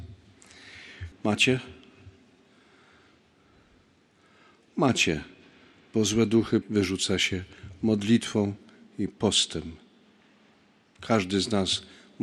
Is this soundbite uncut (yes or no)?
no